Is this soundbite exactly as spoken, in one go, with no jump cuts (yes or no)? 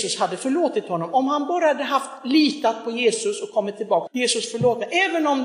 no